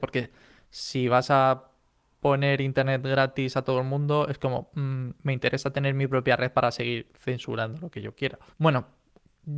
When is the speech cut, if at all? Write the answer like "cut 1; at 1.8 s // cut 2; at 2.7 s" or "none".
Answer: cut 1; at 8.5 s